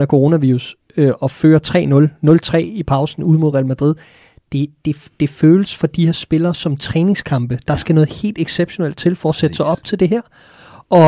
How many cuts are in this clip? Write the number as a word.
zero